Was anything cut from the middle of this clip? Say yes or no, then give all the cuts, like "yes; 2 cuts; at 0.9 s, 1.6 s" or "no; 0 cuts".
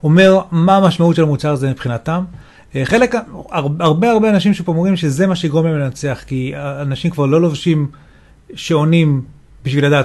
no; 0 cuts